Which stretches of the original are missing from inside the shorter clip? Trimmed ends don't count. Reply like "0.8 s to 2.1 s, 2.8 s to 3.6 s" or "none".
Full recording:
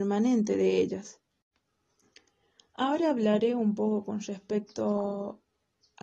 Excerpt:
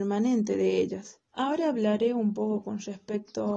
1.3 s to 2.7 s